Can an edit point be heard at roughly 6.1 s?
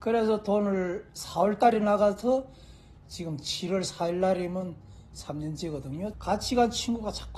yes; 1 cut; at 6.1 s

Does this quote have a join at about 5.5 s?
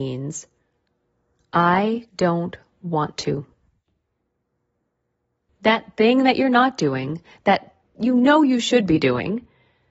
yes; 1 cut; at 5.5 s

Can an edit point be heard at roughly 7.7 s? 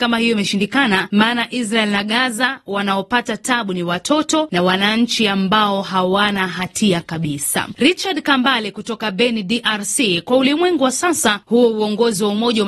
yes; 1 cut; at 7.7 s

